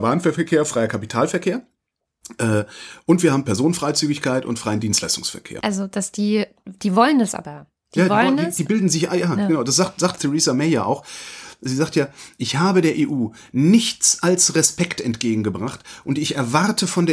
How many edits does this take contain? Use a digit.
1